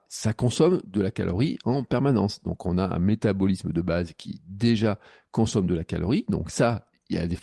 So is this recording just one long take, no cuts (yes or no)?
yes